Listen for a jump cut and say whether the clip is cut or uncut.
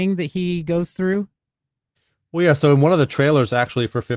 uncut